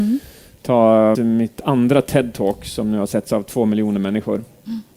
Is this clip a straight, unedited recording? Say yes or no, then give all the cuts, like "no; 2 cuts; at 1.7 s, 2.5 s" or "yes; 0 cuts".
no; 1 cut; at 1.1 s